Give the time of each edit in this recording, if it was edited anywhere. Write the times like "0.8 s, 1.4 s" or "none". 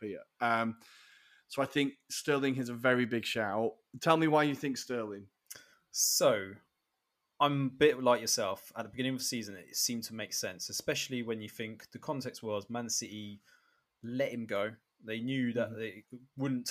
none